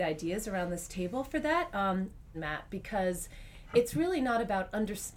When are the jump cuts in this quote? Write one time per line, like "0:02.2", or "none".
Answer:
0:02.3